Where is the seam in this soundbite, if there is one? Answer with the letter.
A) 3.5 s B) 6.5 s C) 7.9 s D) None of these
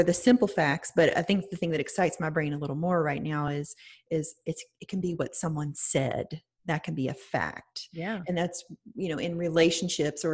D